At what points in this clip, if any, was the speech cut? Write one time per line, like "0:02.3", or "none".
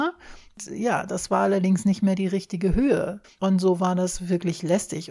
0:03.2